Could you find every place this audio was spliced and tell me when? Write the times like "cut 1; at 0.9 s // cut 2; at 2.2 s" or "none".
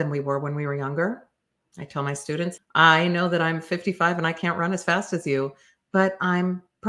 cut 1; at 2.6 s